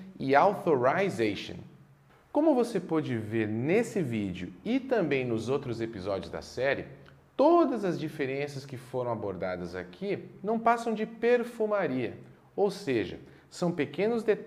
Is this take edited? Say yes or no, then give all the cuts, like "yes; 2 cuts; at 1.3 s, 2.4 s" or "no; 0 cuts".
no; 0 cuts